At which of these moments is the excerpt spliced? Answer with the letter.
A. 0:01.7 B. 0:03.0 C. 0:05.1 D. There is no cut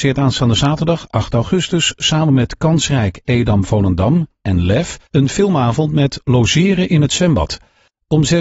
C